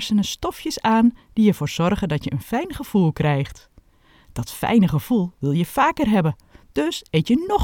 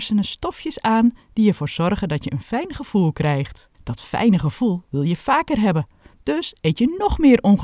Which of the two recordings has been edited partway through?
second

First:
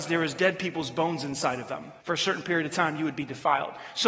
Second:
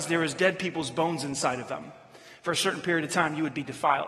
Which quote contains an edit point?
first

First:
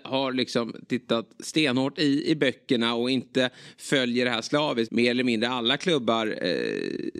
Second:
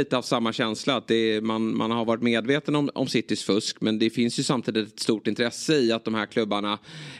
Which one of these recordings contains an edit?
first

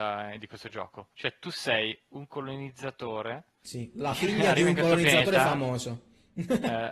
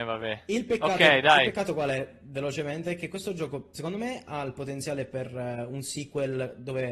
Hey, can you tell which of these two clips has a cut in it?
first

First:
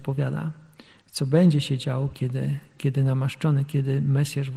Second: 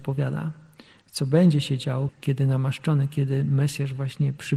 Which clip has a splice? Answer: second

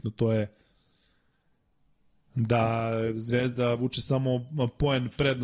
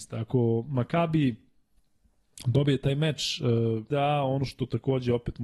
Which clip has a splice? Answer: second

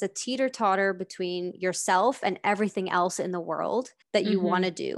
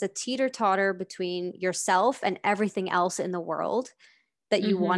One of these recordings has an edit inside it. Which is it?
first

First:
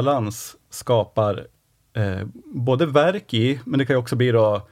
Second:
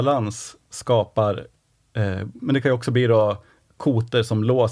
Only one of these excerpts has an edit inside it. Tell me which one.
second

